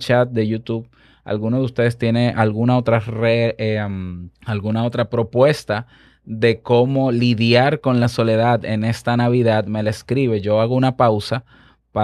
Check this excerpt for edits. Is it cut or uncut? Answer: cut